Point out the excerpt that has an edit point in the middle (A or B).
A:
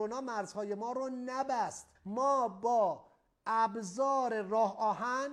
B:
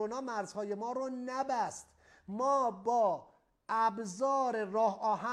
A